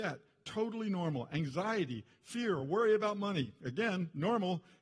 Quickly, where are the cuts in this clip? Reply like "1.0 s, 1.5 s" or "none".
none

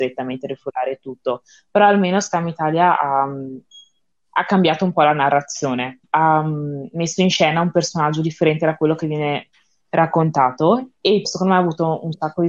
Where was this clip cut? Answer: 6.0 s, 11.2 s

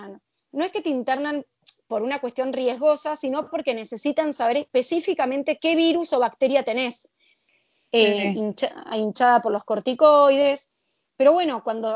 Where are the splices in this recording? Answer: none

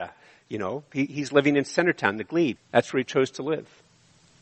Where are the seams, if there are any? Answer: 2.6 s

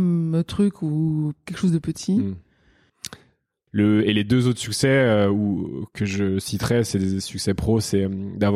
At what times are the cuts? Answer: 3.7 s

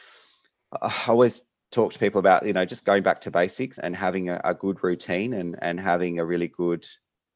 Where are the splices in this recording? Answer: 3.8 s

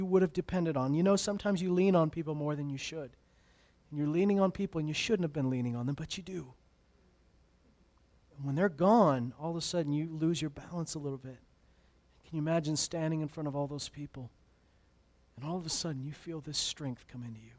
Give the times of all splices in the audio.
none

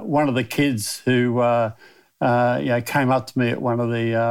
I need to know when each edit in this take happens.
none

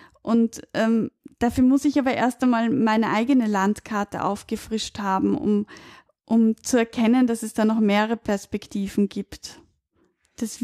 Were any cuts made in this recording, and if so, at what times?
none

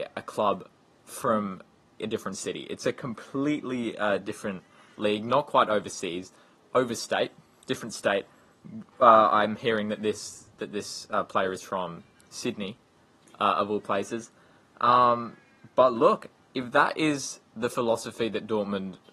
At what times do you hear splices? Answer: 2.0 s

